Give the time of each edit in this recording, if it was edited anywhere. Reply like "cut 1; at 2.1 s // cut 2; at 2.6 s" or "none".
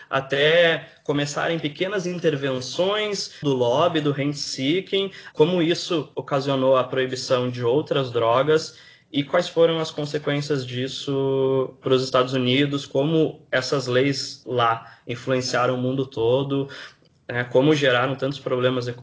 cut 1; at 3.4 s // cut 2; at 5.3 s